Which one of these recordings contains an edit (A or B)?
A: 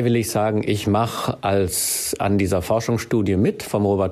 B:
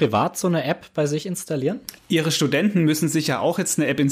B